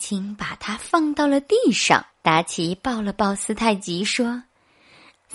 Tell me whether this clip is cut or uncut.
cut